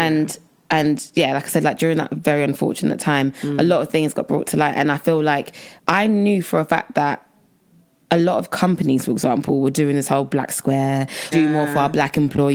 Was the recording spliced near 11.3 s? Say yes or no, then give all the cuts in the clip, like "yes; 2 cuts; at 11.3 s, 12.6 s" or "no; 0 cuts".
yes; 2 cuts; at 5.8 s, 11.3 s